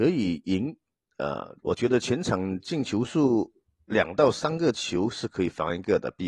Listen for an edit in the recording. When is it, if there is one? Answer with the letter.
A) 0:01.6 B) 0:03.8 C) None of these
A